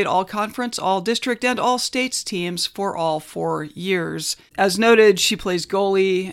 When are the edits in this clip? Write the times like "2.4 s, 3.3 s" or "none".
4.5 s